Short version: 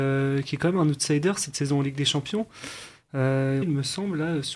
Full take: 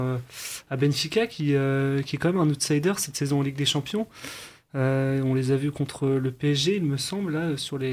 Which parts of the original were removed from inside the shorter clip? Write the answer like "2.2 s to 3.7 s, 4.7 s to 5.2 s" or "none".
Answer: 5.2 s to 6.8 s